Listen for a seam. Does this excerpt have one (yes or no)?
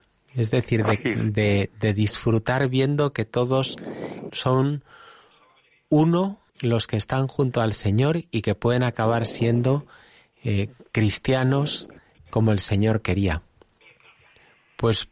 yes